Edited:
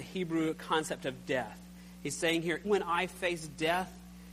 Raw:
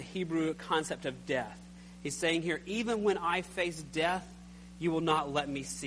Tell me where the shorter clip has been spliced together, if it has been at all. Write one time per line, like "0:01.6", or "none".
0:02.6